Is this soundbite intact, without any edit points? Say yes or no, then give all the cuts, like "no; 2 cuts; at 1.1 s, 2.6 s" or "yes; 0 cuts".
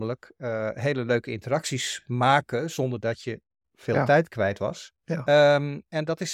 no; 1 cut; at 5.0 s